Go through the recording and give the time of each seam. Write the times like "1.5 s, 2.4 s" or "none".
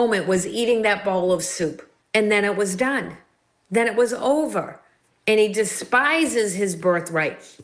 none